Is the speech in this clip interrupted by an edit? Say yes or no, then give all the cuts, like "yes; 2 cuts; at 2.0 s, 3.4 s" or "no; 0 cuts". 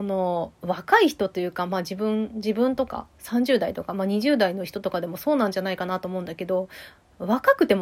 no; 0 cuts